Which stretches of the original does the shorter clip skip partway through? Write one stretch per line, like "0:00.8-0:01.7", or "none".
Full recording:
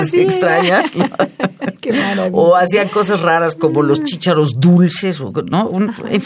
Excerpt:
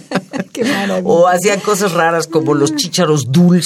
none